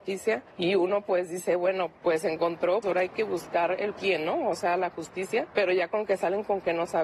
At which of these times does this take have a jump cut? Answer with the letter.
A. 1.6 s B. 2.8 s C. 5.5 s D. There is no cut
B